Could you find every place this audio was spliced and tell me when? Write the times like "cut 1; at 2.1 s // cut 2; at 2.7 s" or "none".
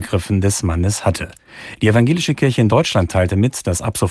none